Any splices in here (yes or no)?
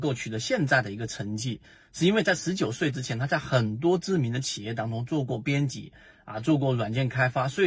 no